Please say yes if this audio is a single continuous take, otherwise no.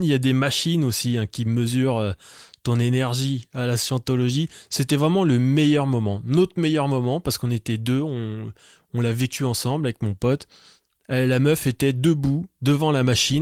yes